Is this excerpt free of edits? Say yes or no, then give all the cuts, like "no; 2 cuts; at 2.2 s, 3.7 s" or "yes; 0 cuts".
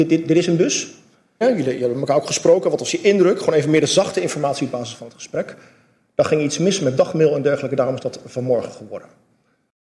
no; 2 cuts; at 1.4 s, 6.0 s